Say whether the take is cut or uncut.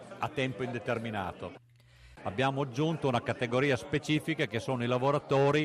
cut